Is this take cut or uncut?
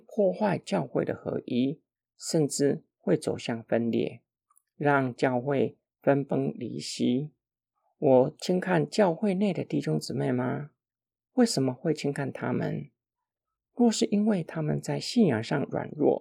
uncut